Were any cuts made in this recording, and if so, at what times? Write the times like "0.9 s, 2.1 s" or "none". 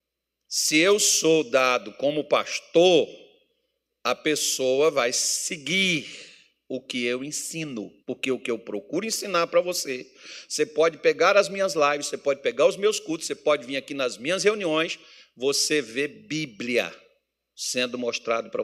8.0 s